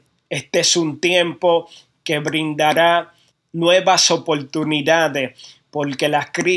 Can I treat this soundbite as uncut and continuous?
yes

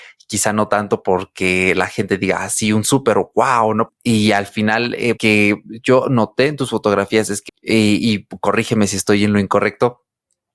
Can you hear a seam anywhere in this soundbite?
yes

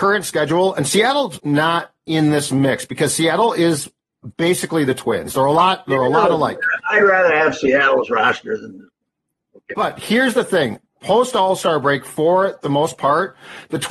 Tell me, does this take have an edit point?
yes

